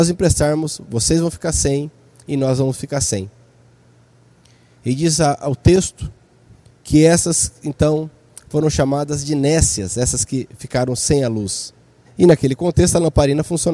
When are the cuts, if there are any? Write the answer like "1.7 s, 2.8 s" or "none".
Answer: 12.0 s